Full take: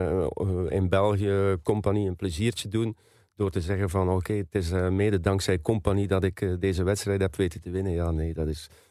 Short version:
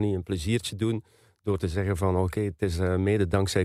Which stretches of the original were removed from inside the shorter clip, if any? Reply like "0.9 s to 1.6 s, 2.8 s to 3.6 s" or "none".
none